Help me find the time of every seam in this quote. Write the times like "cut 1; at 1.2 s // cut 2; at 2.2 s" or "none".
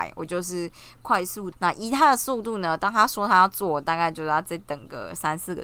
cut 1; at 1.5 s